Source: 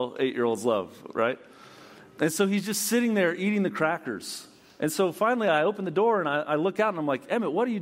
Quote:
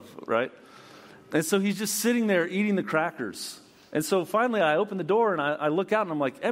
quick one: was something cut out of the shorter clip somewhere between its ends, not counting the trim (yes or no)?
no